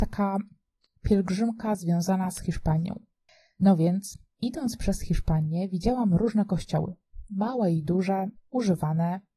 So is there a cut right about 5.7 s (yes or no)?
no